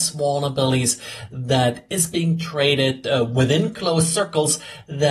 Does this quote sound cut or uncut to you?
uncut